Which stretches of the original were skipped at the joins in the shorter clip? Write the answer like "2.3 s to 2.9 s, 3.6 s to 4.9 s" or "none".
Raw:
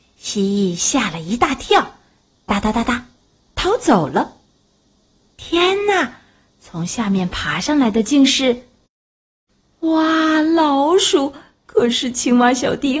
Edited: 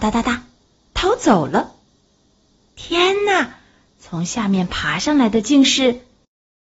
none